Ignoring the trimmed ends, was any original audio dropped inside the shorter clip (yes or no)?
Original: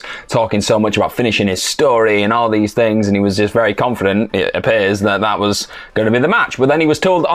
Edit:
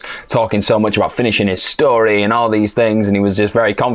no